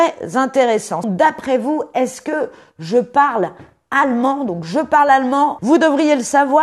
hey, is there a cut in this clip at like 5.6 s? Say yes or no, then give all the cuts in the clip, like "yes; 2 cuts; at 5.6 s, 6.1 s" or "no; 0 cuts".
yes; 2 cuts; at 1.0 s, 5.6 s